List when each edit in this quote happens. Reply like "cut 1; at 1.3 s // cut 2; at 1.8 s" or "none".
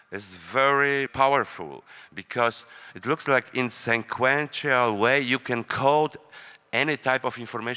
cut 1; at 1.1 s